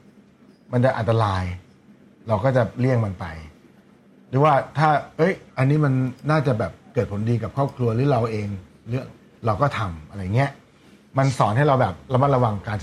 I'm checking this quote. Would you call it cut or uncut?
uncut